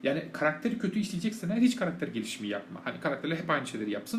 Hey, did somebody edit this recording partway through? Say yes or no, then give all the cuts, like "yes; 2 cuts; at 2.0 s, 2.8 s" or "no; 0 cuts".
no; 0 cuts